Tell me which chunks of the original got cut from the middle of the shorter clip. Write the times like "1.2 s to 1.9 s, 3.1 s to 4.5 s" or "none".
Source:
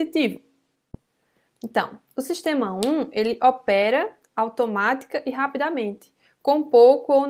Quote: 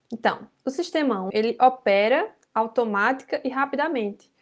2.8 s to 3.1 s